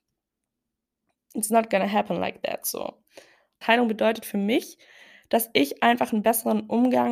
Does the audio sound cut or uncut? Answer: cut